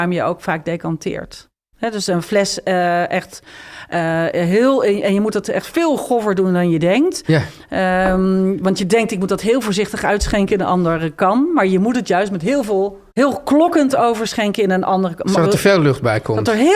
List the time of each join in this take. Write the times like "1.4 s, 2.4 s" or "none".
13.1 s